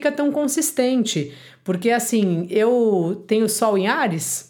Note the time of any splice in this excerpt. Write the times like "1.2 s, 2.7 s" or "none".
none